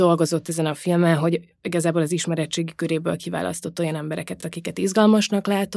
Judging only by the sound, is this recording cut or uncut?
uncut